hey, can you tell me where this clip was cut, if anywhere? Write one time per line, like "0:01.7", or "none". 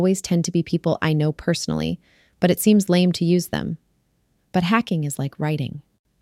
0:04.4

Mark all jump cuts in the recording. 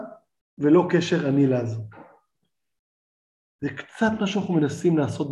none

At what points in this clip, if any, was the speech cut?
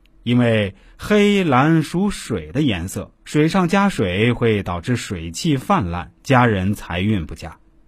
none

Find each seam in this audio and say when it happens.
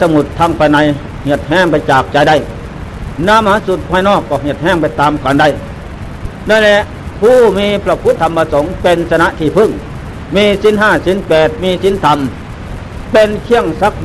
0:08.2

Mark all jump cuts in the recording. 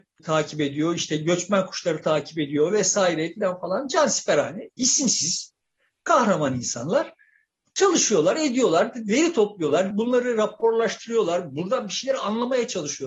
0:09.9

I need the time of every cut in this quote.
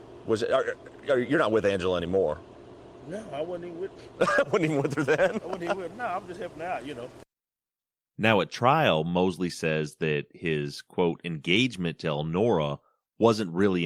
none

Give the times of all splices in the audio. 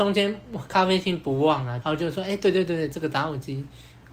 0:01.8

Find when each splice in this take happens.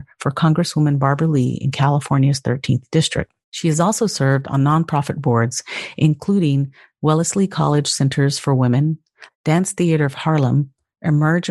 0:03.4
0:09.3

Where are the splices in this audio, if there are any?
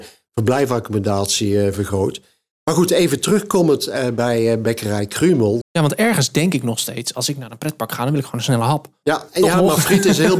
0:05.6
0:09.0

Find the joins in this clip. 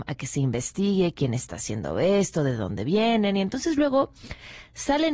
none

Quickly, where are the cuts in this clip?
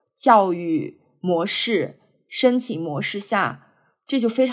none

